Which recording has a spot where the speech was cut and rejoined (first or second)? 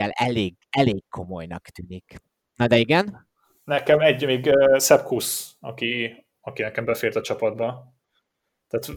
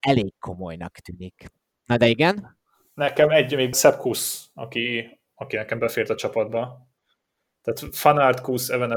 second